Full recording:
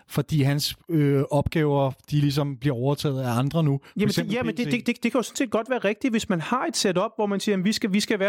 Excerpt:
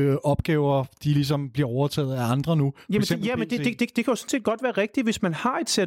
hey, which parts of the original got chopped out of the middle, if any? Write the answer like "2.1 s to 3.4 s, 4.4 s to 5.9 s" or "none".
none